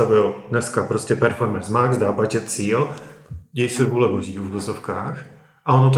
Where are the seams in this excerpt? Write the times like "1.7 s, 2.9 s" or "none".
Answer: none